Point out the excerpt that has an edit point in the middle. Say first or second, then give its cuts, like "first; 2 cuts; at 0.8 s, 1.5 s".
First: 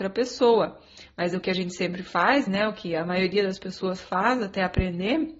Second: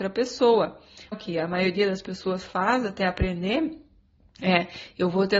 second; 1 cut; at 1.1 s